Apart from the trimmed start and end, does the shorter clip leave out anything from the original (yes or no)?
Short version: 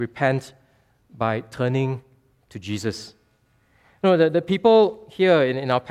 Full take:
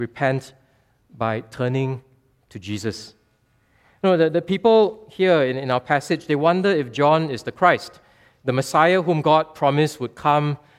no